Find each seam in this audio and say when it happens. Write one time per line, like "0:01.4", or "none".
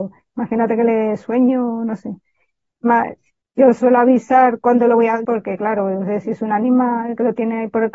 0:03.4
0:05.2